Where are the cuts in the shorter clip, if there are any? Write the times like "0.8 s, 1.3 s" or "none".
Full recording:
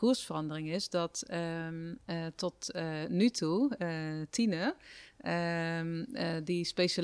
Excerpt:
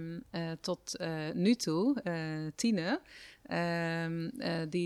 none